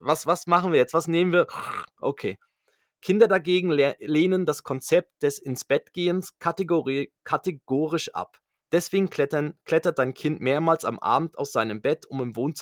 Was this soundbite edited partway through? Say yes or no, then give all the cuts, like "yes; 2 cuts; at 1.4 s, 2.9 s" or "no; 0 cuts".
no; 0 cuts